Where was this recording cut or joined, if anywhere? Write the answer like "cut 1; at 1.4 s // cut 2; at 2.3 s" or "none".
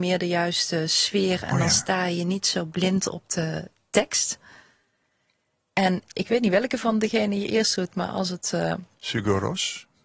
none